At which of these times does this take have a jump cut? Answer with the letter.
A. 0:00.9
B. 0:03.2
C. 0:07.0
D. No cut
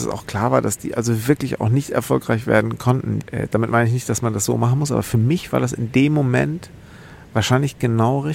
B